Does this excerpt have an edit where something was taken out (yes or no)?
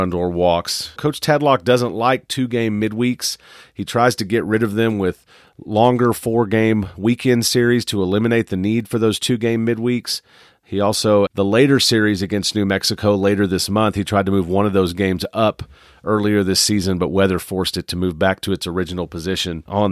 yes